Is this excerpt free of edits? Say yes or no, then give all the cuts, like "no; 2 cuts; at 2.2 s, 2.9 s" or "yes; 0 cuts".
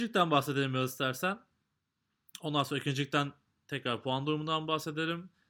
yes; 0 cuts